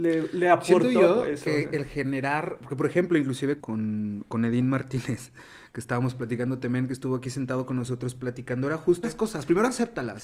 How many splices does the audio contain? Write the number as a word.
two